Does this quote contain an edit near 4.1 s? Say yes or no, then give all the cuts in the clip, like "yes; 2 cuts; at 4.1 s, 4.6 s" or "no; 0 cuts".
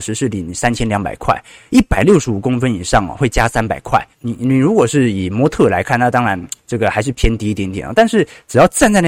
yes; 1 cut; at 4.1 s